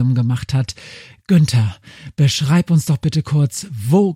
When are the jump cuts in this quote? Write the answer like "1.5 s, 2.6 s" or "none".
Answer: none